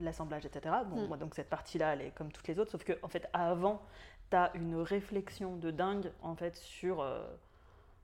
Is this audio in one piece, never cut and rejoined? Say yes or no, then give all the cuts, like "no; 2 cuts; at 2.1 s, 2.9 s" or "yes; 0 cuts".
yes; 0 cuts